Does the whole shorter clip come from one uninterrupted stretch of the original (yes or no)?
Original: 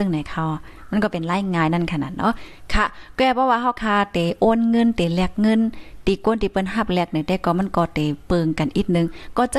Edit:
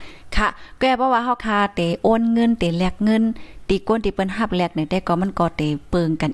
yes